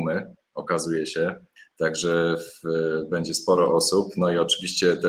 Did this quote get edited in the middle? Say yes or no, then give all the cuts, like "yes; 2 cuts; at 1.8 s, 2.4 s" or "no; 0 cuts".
no; 0 cuts